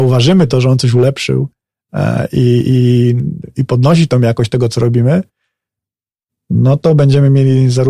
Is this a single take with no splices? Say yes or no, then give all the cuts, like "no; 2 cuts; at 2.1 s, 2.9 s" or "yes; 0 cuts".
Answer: yes; 0 cuts